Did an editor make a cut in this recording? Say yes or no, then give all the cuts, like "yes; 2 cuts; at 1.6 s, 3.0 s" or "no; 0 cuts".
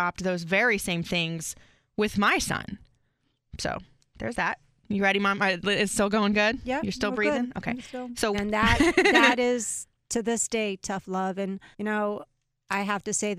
yes; 2 cuts; at 8.3 s, 11.7 s